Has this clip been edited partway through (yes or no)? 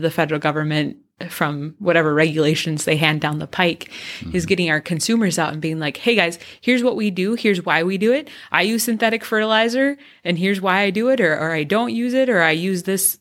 no